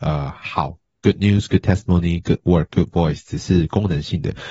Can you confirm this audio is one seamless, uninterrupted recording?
yes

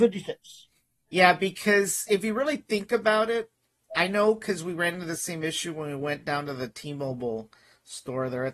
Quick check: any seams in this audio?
no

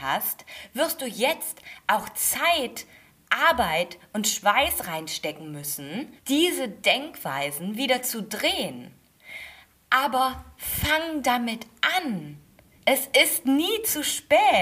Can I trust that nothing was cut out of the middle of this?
no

